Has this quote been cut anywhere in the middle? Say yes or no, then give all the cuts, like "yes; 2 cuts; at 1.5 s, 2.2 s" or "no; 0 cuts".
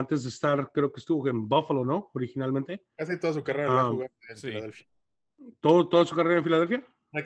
no; 0 cuts